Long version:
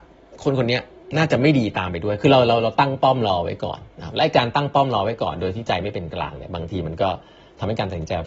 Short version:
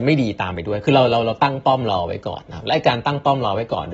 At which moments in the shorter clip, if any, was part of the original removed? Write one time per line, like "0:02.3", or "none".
0:02.4